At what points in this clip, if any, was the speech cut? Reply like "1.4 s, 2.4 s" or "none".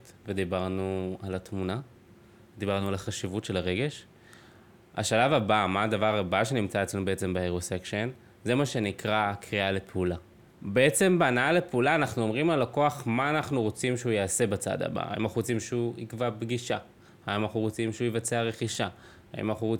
10.5 s